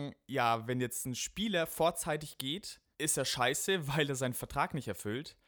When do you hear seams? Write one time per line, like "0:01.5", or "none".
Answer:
0:02.9